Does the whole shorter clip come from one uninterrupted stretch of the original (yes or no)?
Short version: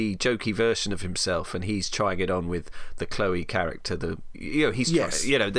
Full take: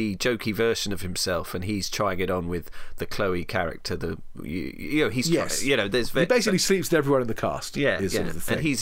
no